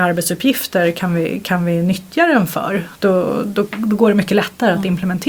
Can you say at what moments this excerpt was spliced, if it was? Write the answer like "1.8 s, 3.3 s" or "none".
2.9 s